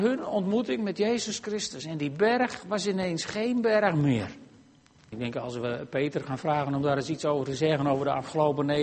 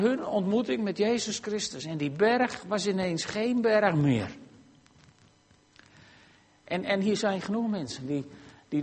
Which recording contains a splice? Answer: first; 1 cut; at 5.1 s

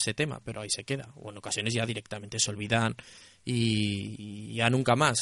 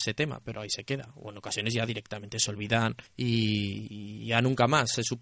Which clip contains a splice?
second; 1 cut; at 3.1 s

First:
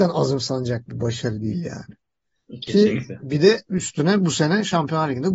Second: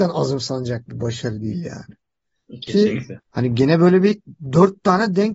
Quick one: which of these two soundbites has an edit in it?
second; 1 cut; at 3.2 s

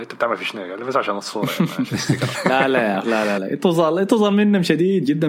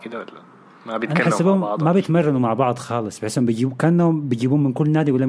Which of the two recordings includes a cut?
first; 2 cuts; at 2.3 s, 3.4 s

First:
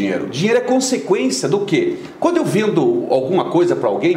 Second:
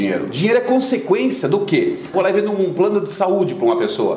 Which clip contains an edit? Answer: second; 1 cut; at 2.1 s

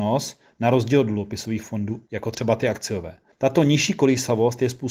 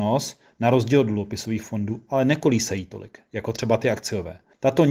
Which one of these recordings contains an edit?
first; 1 cut; at 2.1 s

